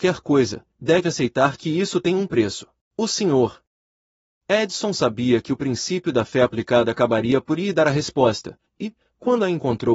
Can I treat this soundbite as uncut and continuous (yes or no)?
no